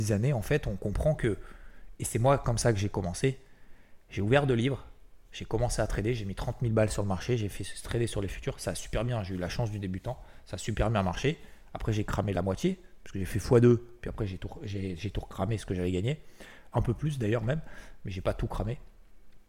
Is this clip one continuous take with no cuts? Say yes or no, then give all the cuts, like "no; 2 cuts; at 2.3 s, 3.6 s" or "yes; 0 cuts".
no; 1 cut; at 16.7 s